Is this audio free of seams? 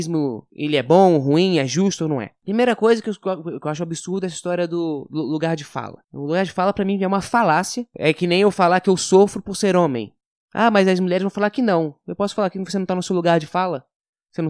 yes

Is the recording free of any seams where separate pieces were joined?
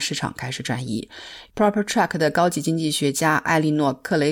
no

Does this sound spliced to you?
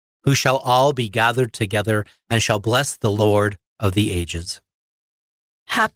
no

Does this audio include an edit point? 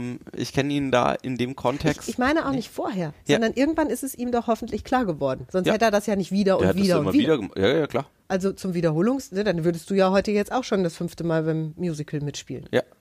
no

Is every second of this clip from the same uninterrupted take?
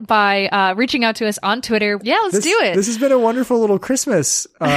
no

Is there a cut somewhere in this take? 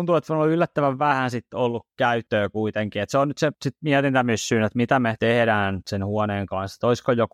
no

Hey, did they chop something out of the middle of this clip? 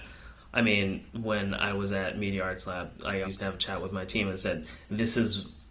yes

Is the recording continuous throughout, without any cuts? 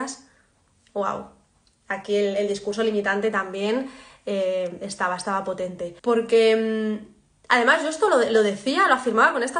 no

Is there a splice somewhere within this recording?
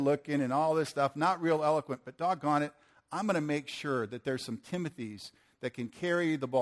no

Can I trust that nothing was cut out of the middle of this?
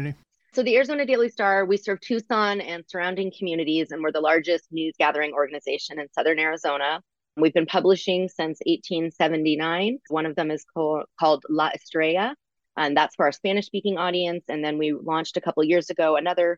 no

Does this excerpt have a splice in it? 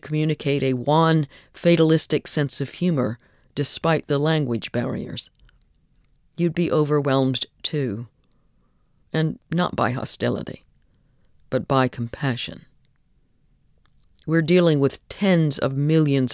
no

